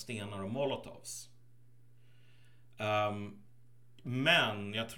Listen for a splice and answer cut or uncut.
uncut